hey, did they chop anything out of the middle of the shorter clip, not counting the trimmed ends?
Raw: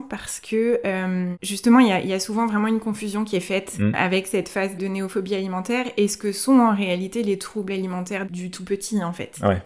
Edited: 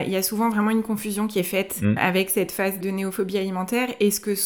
no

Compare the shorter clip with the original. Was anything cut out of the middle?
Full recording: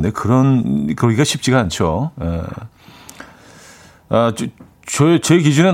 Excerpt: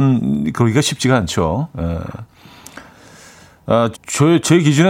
yes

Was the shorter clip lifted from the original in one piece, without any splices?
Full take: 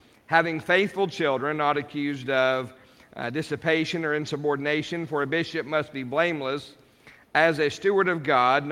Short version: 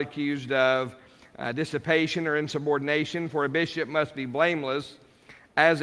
yes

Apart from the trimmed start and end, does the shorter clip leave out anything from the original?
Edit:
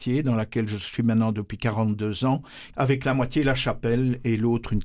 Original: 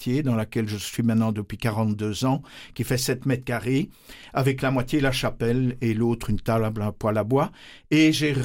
yes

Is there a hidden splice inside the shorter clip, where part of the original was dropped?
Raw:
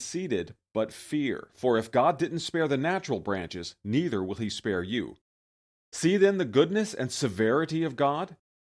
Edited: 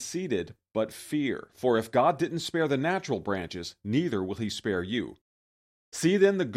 no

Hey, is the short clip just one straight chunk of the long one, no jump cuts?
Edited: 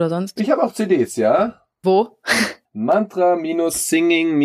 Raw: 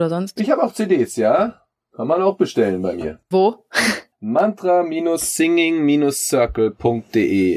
no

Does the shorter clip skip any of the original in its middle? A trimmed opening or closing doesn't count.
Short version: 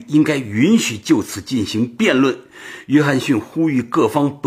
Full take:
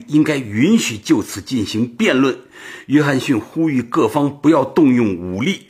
no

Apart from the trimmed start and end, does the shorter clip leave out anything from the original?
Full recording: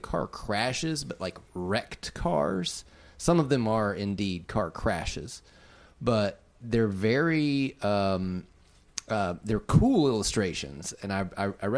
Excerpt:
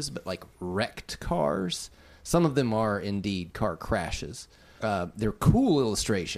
yes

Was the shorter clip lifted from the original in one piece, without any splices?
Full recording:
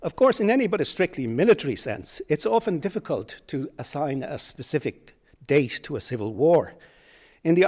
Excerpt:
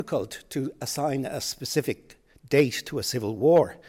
yes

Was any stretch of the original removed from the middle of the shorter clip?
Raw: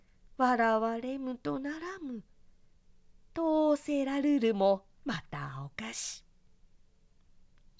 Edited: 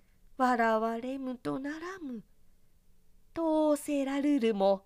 no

